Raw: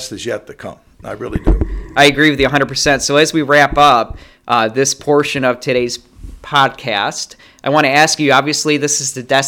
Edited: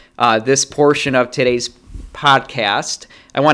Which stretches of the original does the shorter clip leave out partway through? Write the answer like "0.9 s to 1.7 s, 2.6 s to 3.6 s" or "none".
none